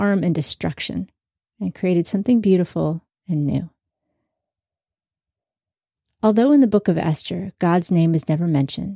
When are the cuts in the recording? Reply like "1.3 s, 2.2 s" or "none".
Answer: none